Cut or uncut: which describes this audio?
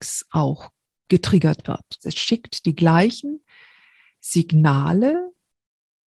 cut